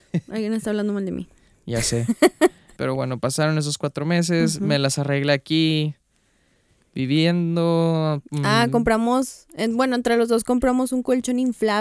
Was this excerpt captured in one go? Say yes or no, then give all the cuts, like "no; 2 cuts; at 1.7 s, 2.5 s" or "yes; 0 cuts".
no; 1 cut; at 2.8 s